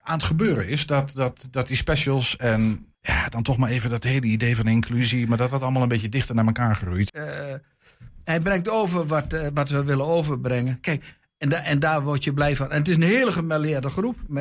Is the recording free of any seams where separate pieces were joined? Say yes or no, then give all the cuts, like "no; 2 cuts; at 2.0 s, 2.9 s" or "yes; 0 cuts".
no; 2 cuts; at 2.9 s, 7.1 s